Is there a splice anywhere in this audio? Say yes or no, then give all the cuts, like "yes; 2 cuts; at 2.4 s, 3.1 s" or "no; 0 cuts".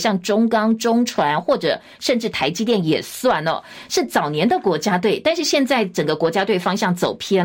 no; 0 cuts